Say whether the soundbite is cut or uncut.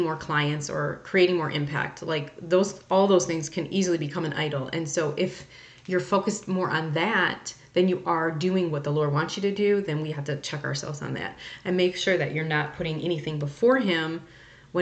uncut